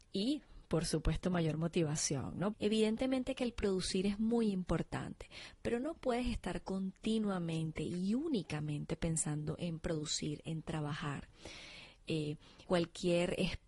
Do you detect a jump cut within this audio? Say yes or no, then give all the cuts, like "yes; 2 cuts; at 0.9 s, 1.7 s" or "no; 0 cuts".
yes; 2 cuts; at 2.5 s, 12.6 s